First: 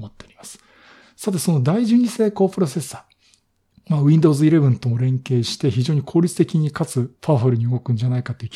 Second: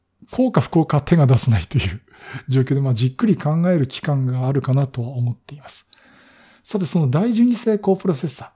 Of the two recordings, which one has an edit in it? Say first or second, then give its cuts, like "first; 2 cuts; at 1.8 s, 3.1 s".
first; 1 cut; at 1.0 s